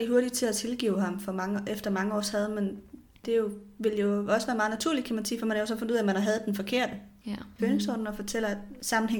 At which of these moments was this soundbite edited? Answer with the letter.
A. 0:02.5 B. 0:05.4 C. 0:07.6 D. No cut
C